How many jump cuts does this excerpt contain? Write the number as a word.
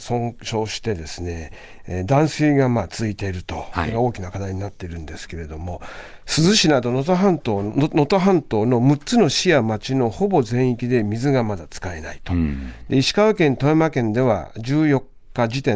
zero